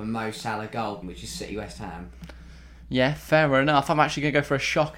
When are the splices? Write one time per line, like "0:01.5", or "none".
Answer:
0:01.0